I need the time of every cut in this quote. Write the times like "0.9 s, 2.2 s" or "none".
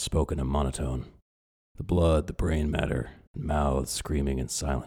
1.5 s, 3.3 s